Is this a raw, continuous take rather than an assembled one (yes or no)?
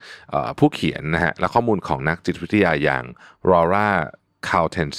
yes